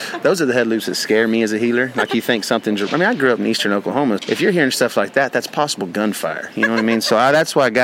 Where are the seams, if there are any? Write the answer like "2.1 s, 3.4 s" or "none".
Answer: 4.2 s

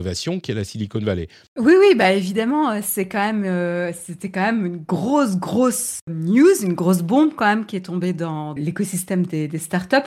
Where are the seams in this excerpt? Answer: 1.5 s, 6.1 s, 8.6 s

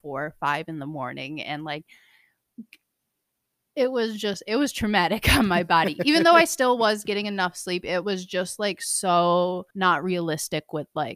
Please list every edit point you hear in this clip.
9.7 s

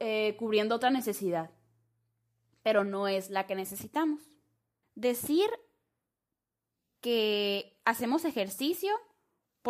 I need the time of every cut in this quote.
4.8 s

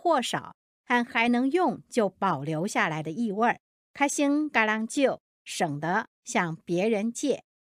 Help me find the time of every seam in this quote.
3.8 s

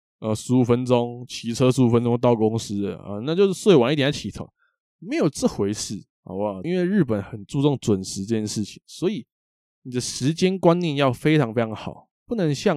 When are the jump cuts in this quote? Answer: 6.6 s

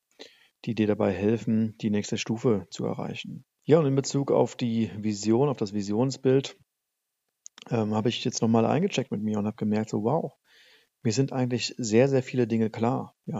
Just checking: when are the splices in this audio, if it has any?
3.6 s

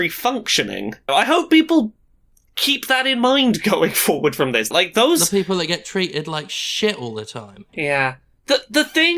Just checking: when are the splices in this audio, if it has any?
1.1 s, 4.7 s, 7.7 s

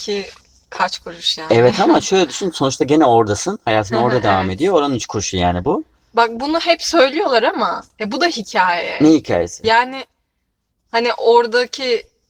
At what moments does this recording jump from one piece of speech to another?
none

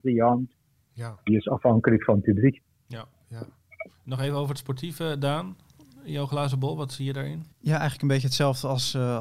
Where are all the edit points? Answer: 7.5 s

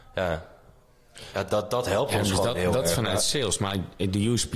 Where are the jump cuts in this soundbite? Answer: none

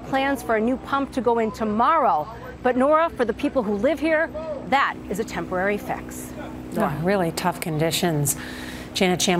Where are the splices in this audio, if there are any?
none

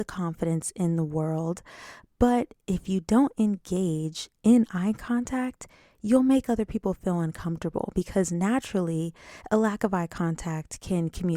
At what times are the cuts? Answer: none

